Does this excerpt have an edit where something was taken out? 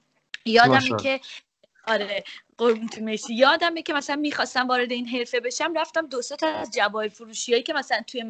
no; 0 cuts

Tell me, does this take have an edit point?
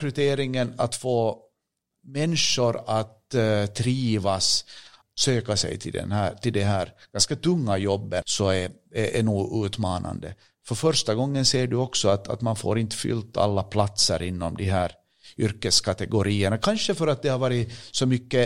yes; 2 cuts; at 5.0 s, 8.2 s

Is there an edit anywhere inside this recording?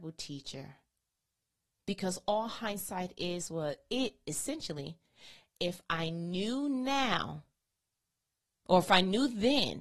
no; 0 cuts

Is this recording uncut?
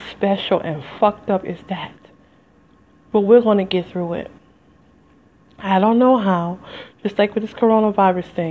yes; 0 cuts

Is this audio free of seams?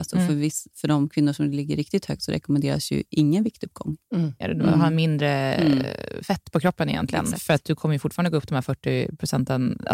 no; 1 cut; at 4.4 s

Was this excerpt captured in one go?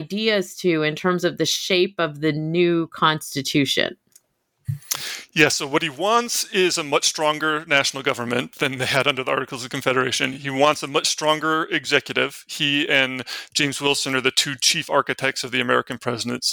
yes; 0 cuts

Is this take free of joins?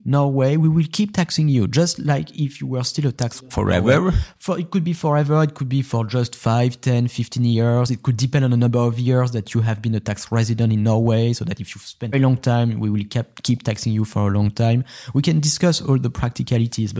no; 1 cut; at 12.1 s

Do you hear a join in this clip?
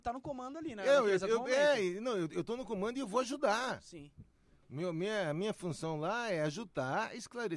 no; 0 cuts

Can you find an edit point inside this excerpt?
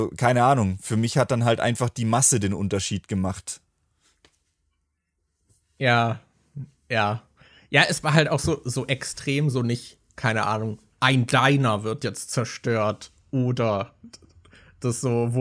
no; 0 cuts

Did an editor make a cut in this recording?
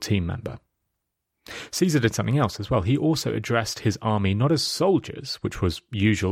no; 0 cuts

